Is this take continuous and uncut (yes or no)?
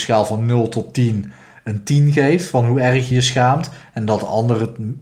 no